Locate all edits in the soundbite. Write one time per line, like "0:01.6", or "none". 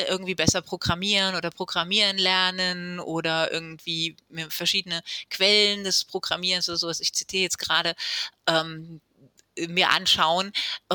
none